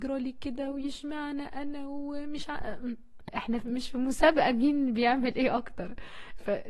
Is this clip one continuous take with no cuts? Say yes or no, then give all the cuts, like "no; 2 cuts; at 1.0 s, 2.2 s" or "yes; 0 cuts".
no; 1 cut; at 3.3 s